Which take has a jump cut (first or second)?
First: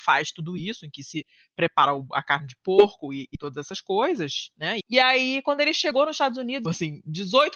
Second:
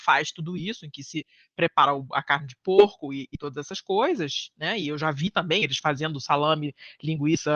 first